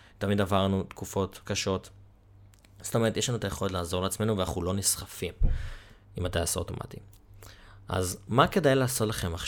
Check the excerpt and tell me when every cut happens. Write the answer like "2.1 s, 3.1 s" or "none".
none